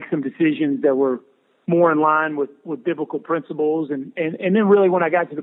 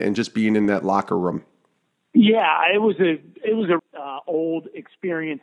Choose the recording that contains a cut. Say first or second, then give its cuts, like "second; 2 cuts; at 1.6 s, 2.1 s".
second; 1 cut; at 3.8 s